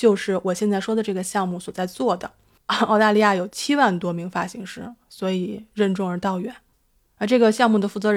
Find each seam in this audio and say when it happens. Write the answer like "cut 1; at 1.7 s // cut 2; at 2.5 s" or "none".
cut 1; at 2.6 s